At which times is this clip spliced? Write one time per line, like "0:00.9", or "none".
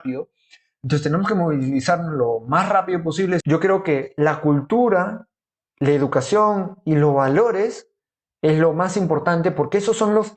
0:03.4